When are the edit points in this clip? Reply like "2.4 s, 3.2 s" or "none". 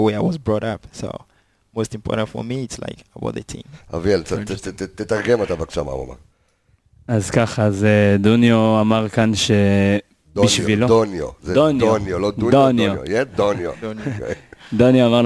none